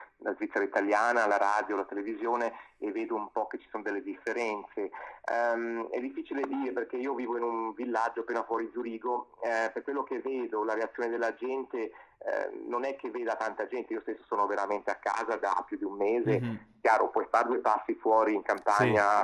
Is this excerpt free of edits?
yes; 0 cuts

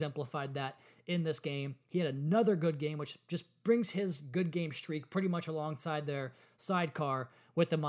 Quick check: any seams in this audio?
no; 0 cuts

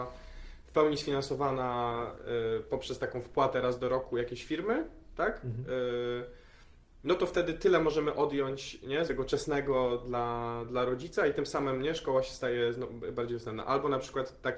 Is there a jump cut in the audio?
yes; 1 cut; at 9.1 s

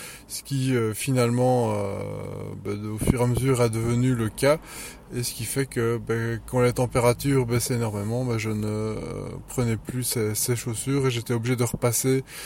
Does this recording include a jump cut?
yes; 1 cut; at 5.1 s

